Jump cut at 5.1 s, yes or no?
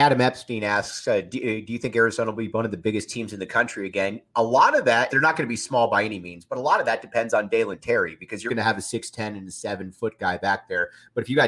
yes